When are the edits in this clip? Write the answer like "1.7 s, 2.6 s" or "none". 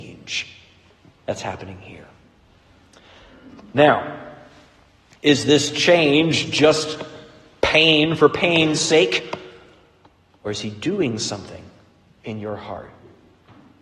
none